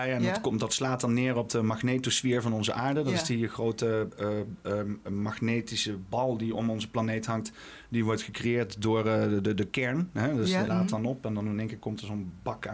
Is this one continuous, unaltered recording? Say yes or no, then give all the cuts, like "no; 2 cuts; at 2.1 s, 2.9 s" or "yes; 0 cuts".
no; 1 cut; at 10.7 s